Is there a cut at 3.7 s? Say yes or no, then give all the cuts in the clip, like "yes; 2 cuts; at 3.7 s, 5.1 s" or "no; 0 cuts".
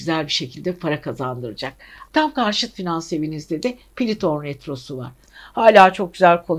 no; 2 cuts; at 2.1 s, 5.2 s